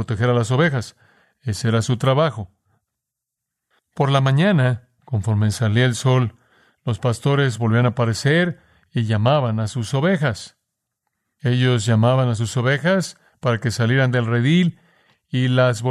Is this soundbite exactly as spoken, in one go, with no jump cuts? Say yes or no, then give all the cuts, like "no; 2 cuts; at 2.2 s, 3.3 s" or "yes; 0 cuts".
yes; 0 cuts